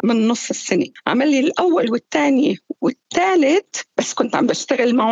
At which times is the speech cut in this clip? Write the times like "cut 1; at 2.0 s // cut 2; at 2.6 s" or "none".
cut 1; at 3.9 s